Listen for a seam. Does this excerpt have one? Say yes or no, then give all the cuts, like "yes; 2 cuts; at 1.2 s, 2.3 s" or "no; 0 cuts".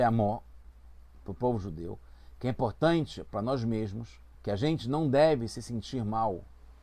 yes; 1 cut; at 4.3 s